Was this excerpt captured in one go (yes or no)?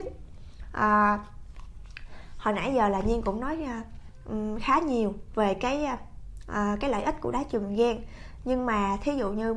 yes